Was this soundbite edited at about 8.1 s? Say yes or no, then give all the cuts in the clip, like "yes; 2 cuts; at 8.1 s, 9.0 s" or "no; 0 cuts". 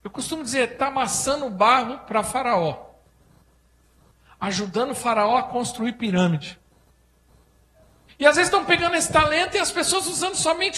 yes; 1 cut; at 8.1 s